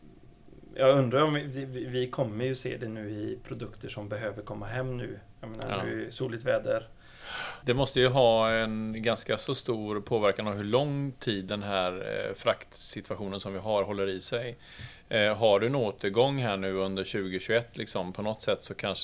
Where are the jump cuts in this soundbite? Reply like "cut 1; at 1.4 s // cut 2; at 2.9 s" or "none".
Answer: cut 1; at 7.6 s